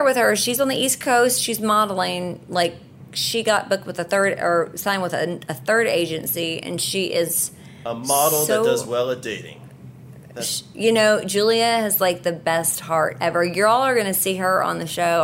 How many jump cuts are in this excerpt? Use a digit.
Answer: 0